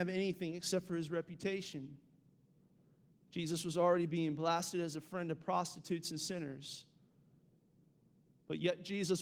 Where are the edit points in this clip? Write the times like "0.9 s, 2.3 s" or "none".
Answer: none